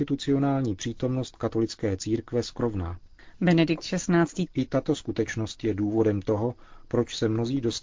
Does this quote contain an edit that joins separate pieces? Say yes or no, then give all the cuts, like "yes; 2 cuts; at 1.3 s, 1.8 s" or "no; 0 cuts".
yes; 1 cut; at 4.5 s